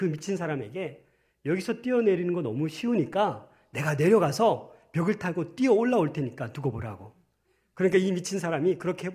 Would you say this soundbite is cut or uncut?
uncut